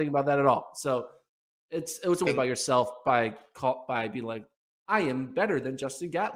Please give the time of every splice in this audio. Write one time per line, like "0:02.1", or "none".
0:02.3